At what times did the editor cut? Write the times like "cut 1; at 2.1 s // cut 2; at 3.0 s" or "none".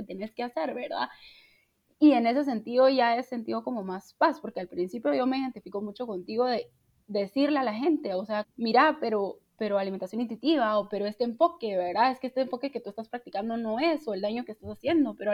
cut 1; at 8.4 s